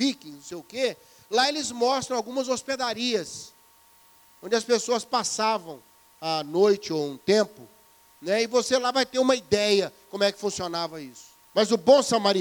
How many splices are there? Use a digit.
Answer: 1